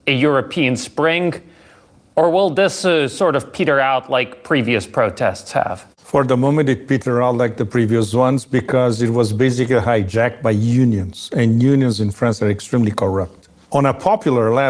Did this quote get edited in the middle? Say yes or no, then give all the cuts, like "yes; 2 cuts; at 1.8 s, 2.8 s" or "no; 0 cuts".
no; 0 cuts